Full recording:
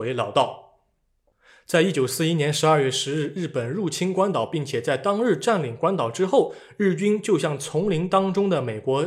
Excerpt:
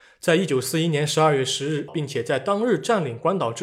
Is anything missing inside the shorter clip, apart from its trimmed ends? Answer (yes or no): yes